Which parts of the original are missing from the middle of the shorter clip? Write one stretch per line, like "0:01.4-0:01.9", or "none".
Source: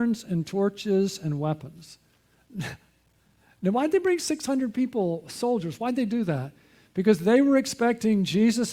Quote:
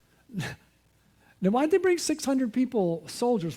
none